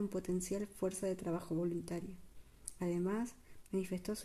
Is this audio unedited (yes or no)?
yes